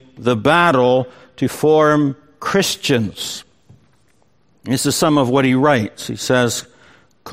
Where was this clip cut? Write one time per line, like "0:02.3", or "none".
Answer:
none